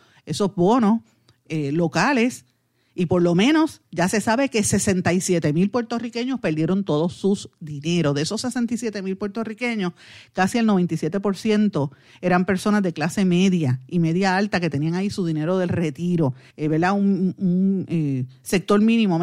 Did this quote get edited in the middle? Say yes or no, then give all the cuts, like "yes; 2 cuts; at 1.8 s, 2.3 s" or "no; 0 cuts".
yes; 1 cut; at 16.5 s